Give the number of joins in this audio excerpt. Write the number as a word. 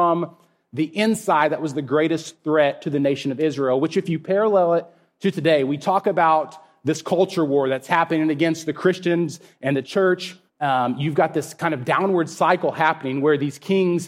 one